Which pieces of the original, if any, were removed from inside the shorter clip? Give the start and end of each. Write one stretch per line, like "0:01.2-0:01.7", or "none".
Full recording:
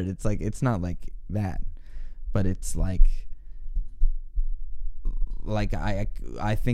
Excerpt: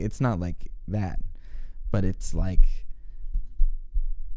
none